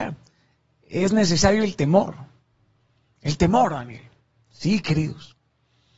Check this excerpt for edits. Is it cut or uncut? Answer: uncut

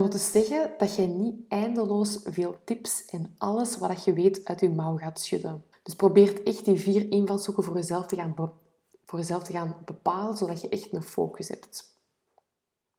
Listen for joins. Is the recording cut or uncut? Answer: cut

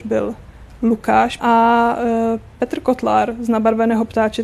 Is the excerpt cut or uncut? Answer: cut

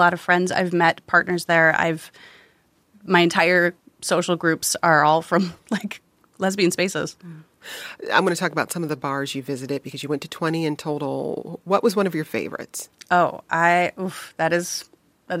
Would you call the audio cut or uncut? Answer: uncut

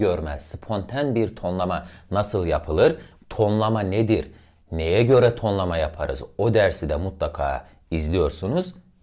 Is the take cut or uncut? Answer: cut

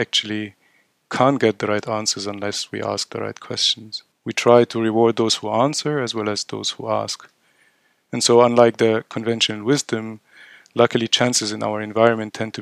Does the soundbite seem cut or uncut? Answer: cut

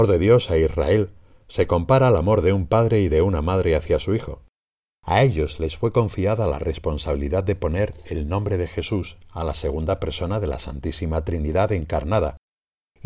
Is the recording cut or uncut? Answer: cut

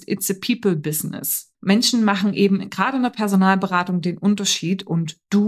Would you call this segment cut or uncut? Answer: cut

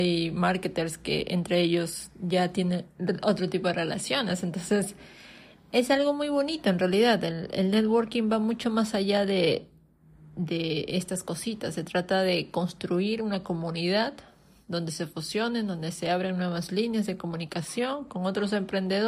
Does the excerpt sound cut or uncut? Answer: uncut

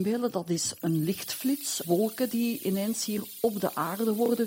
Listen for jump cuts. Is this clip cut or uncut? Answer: cut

